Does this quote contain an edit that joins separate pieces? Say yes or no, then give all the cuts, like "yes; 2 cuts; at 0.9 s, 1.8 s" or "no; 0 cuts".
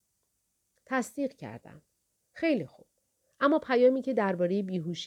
no; 0 cuts